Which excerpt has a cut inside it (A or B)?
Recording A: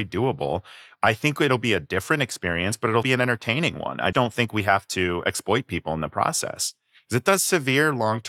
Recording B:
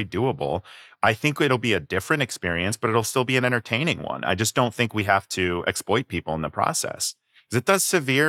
A